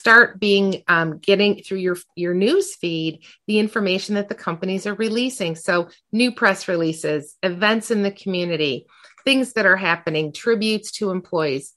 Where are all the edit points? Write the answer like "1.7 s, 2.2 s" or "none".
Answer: none